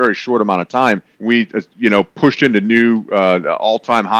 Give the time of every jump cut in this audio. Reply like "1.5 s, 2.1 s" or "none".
1.2 s

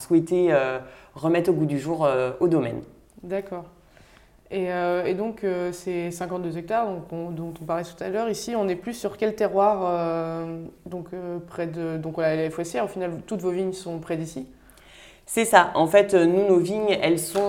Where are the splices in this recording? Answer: none

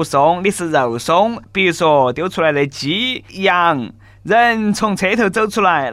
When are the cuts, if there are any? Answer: 1.4 s

